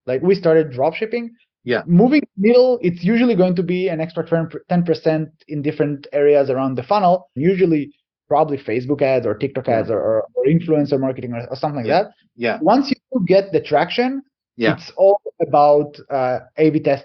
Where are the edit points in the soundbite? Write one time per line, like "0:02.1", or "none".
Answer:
0:07.4